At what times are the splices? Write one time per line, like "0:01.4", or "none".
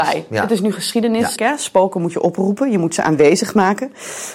0:01.4